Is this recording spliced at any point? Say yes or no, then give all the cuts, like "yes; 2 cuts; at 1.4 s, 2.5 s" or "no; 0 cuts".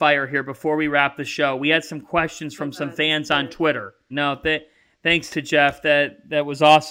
yes; 1 cut; at 4.1 s